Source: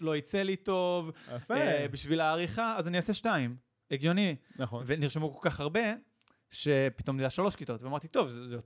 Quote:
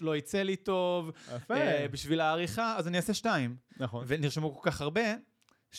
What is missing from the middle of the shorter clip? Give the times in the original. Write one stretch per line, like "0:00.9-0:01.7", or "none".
0:03.7-0:04.5